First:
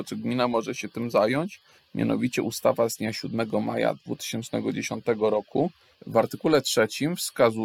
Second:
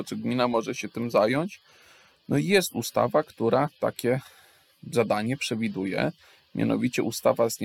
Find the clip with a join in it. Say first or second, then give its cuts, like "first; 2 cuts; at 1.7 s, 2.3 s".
first; 2 cuts; at 1.8 s, 5.9 s